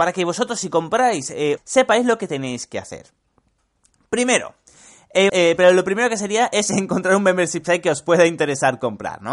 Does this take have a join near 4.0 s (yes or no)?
no